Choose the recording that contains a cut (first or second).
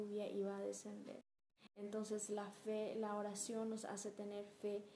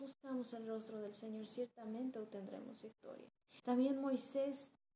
second